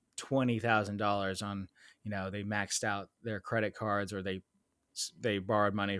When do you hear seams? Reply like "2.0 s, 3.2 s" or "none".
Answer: none